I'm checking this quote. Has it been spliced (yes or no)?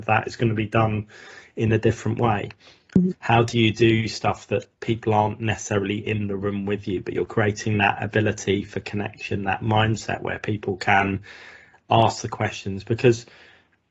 yes